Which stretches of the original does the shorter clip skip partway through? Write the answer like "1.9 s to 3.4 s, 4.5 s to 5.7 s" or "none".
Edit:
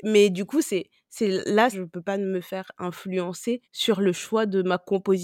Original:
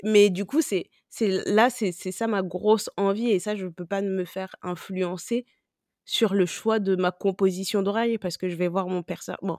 1.7 s to 3.6 s, 5.5 s to 6.0 s